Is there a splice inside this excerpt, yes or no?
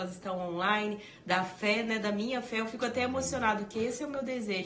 no